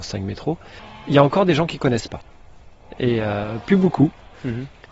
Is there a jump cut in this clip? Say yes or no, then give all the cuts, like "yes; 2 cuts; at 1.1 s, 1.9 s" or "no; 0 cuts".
no; 0 cuts